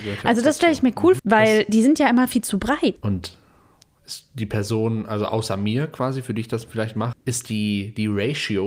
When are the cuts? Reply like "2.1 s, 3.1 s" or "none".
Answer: 1.2 s, 3.0 s, 7.1 s